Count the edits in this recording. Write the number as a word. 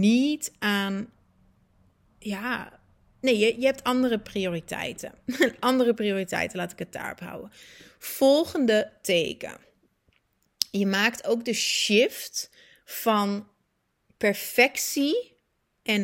zero